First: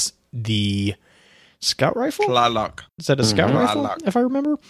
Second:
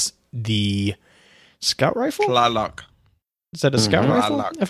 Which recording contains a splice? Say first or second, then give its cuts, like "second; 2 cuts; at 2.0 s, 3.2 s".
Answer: first; 1 cut; at 2.9 s